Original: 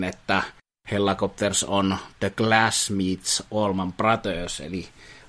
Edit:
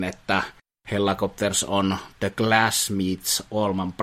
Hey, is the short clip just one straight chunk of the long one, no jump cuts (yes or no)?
yes